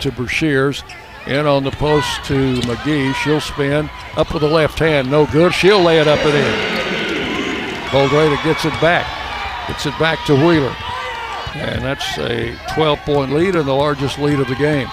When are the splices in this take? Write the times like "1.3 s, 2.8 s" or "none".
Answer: 5.5 s, 7.9 s, 11.5 s